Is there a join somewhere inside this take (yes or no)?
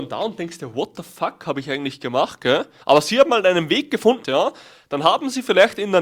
yes